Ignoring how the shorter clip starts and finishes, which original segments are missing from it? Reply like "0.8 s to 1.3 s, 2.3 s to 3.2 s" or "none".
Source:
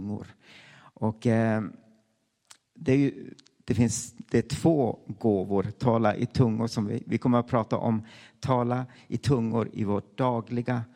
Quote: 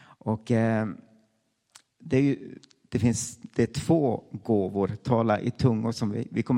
none